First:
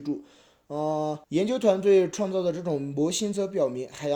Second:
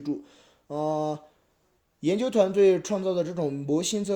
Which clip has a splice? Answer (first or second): first